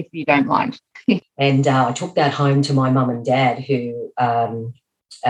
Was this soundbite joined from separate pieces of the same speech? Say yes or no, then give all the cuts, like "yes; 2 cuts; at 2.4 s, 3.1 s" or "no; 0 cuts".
yes; 1 cut; at 1.2 s